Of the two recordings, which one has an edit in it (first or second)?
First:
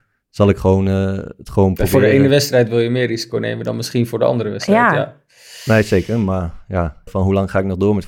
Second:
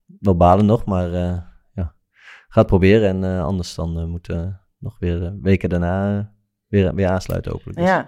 first